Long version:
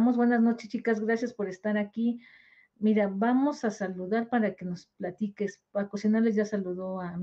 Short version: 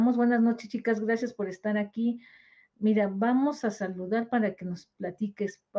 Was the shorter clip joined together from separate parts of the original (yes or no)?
no